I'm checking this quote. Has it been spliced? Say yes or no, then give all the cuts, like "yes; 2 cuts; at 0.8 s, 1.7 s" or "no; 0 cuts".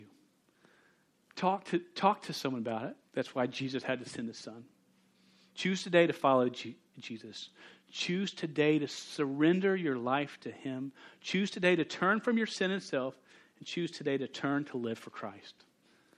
yes; 1 cut; at 3.0 s